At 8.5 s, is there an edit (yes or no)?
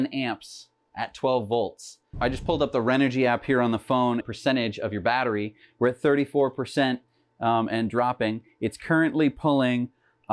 no